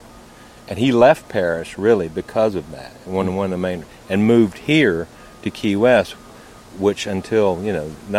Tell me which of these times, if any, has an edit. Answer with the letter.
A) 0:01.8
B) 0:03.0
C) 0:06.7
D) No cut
D